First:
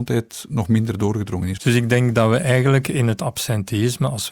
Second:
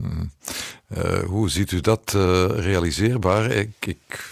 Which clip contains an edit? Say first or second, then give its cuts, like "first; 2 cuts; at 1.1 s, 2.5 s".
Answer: first; 1 cut; at 1.6 s